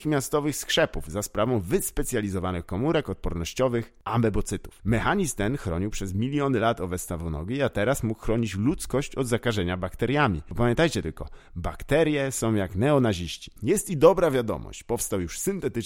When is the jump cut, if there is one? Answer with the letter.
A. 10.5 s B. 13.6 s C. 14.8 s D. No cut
B